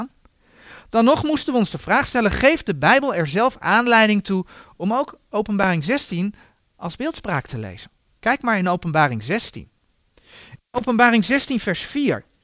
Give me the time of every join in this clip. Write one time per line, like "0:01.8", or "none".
0:08.1